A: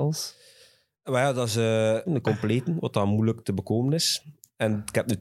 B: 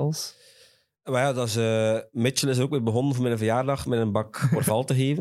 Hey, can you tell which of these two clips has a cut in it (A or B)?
A